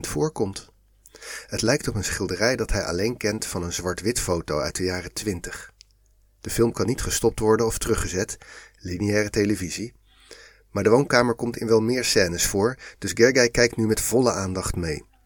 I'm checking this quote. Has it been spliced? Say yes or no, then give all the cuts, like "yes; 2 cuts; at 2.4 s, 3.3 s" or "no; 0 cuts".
no; 0 cuts